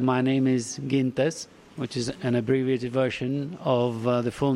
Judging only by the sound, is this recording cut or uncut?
uncut